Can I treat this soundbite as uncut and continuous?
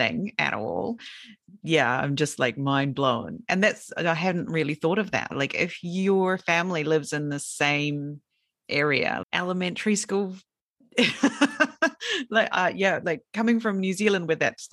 no; 1 cut; at 9.2 s

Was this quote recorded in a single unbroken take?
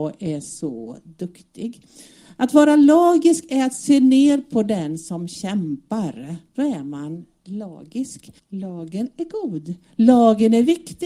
no; 2 cuts; at 6.5 s, 8.4 s

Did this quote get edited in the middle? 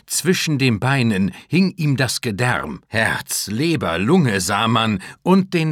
yes; 1 cut; at 2.8 s

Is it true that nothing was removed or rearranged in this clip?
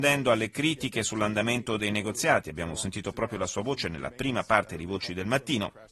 yes; 0 cuts

